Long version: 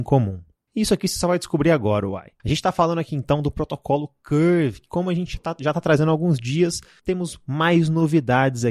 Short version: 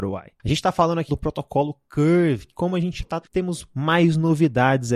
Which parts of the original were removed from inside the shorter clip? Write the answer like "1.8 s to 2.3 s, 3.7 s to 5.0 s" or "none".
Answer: 3.1 s to 3.4 s, 5.6 s to 6.9 s